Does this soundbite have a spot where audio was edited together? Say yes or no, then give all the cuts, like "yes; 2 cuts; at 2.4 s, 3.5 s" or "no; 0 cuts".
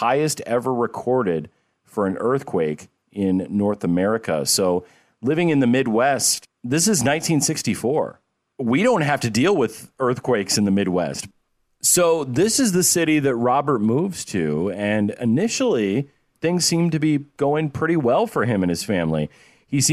no; 0 cuts